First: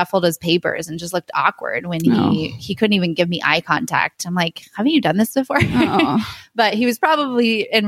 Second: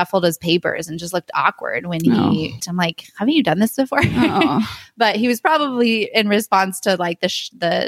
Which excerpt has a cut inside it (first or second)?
second